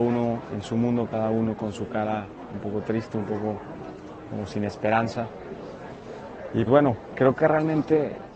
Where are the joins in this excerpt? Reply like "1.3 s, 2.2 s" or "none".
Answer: 6.7 s